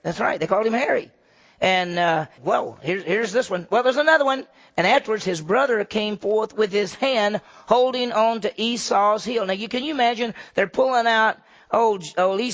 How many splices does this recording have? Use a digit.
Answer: 1